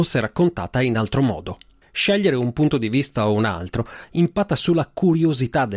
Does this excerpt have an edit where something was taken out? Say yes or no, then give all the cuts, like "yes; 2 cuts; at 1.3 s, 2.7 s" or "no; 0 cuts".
yes; 1 cut; at 1.8 s